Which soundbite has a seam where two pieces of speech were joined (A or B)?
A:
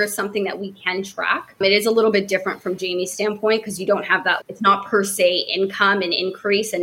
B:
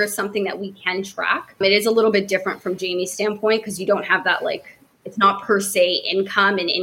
A